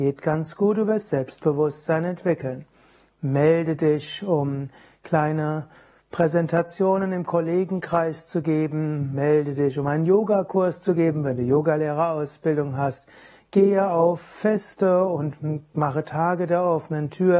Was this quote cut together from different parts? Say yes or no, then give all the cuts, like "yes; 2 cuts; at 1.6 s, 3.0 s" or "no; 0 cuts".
no; 0 cuts